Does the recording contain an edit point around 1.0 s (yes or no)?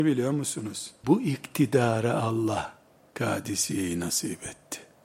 yes